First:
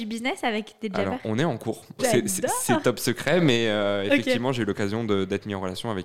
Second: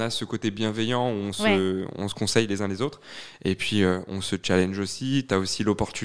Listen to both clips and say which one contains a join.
first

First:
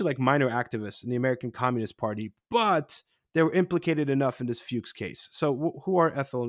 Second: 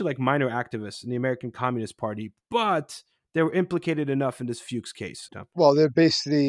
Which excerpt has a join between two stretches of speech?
second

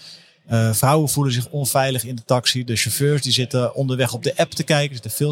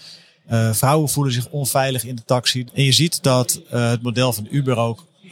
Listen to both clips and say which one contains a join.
second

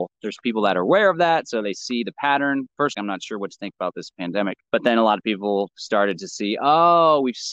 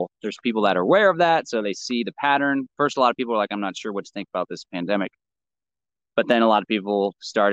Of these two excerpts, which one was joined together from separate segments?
first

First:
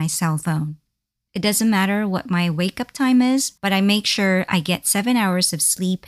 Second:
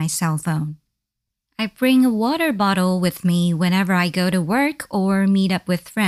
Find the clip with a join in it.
first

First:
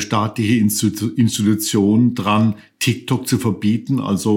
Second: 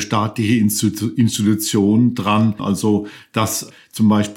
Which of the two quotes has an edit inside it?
second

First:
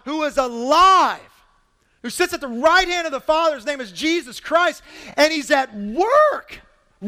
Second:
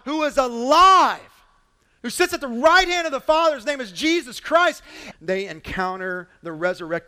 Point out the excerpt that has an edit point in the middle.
second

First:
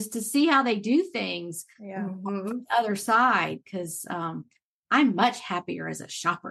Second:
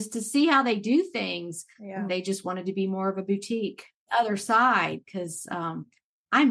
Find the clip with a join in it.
second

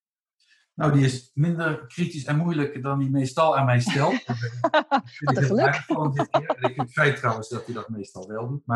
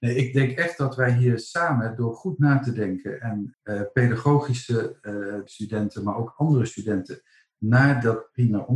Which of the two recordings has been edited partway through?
second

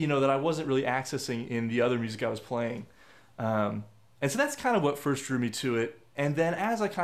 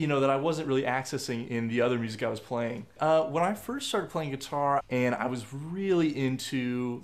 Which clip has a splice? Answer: second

